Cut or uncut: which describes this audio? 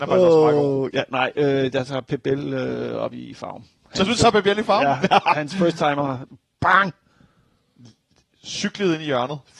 uncut